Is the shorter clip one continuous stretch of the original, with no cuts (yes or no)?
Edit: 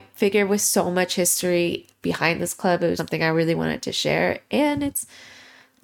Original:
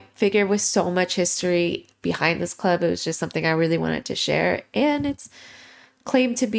no